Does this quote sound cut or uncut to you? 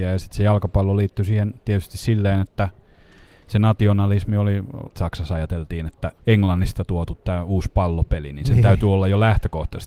cut